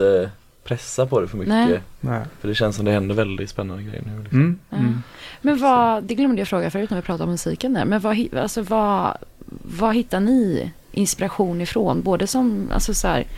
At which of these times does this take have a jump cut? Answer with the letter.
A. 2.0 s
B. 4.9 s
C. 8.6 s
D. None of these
D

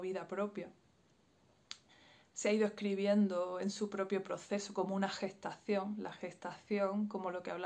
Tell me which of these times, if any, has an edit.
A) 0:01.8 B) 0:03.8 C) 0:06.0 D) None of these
D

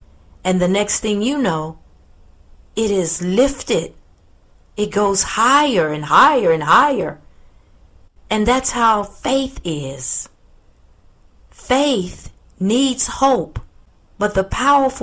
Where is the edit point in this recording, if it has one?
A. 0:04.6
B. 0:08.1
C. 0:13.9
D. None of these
B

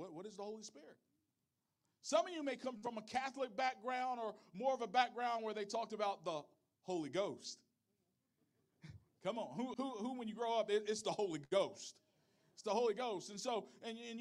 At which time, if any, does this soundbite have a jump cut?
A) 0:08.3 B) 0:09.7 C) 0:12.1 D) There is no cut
B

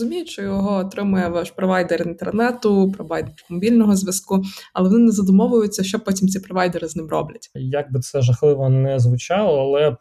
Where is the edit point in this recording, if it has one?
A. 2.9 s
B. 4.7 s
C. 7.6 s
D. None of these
C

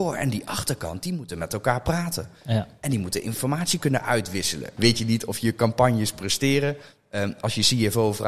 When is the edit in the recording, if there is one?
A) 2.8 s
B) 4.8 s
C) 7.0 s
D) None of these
B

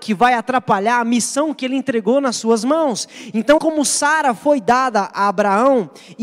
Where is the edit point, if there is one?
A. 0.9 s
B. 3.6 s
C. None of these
B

